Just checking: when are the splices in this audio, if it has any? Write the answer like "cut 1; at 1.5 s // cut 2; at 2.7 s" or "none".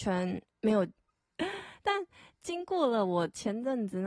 cut 1; at 1.1 s